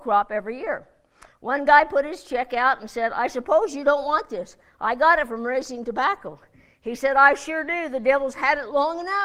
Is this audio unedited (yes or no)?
yes